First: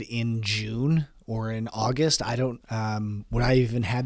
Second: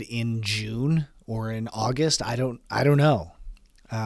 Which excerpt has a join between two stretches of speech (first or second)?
first